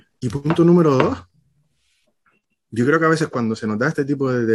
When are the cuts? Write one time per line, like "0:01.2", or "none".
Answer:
none